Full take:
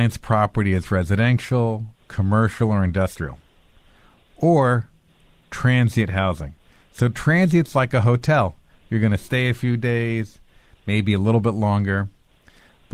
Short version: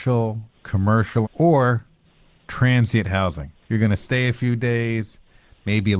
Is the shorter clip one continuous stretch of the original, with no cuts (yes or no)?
no